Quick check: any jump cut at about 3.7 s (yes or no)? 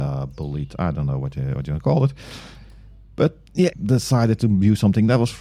yes